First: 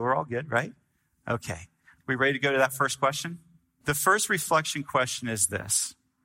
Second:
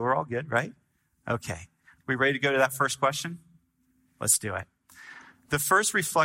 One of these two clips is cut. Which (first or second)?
first